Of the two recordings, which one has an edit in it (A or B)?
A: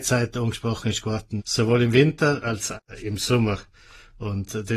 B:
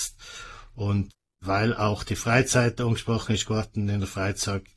A